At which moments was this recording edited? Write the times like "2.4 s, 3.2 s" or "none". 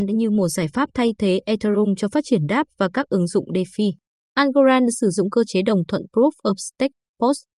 4.2 s

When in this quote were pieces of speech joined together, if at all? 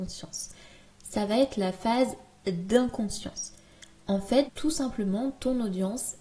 4.5 s

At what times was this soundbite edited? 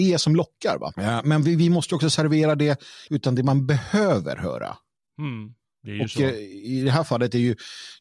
0.9 s, 3.1 s

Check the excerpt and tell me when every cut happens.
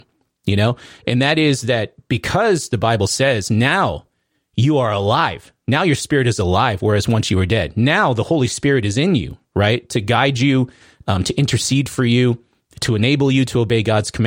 none

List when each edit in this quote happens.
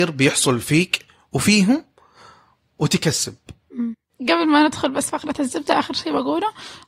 2.7 s

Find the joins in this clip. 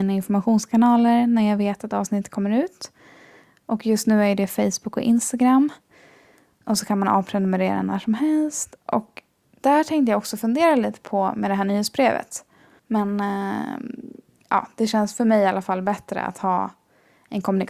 6.6 s, 12.8 s

